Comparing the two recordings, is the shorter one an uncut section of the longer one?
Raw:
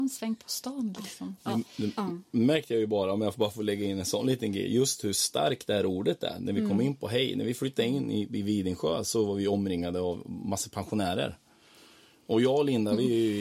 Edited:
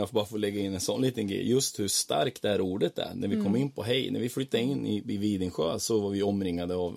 yes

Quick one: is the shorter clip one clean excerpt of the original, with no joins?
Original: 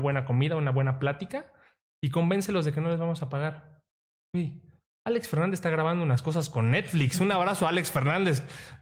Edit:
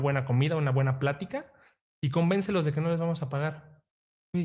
yes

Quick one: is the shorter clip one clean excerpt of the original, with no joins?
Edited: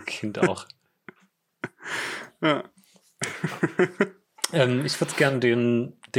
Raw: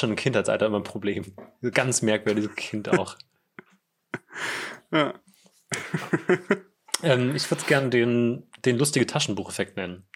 yes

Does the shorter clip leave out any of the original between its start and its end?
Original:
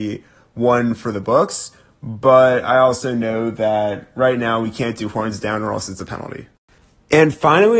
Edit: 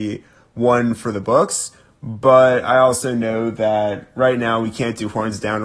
no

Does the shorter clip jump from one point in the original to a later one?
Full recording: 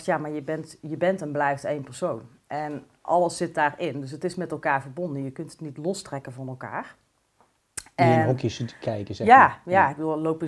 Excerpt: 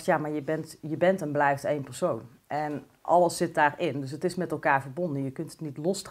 no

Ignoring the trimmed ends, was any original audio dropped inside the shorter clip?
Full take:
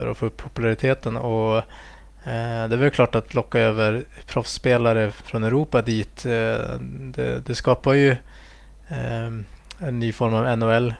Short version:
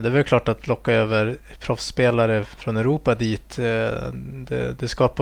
no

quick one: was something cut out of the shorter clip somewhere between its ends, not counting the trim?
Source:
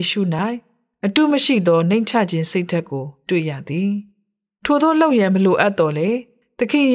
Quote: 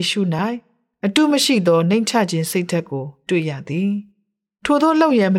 no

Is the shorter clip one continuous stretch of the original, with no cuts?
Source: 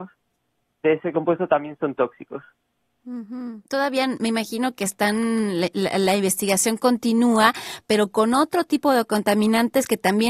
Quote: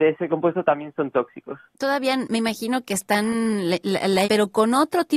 no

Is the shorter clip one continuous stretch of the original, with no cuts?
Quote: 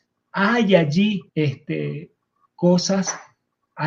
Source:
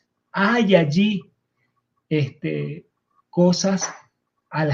no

